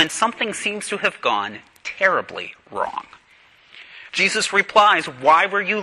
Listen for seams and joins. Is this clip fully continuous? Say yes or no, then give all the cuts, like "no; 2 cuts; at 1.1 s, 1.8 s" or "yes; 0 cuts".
no; 1 cut; at 4.1 s